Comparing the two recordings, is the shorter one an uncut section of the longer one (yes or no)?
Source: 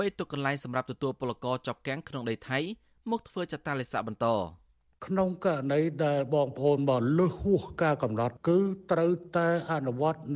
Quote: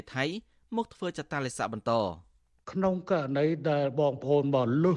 yes